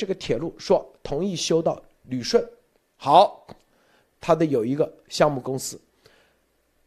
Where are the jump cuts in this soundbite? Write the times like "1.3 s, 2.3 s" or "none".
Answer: 4.0 s